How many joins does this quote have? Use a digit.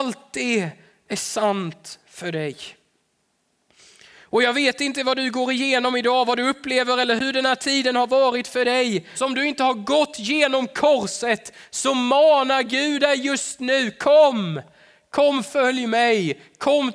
1